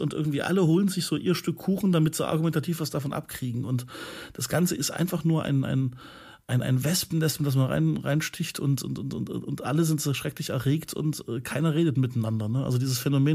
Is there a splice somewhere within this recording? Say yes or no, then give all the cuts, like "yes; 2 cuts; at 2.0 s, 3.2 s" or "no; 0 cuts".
no; 0 cuts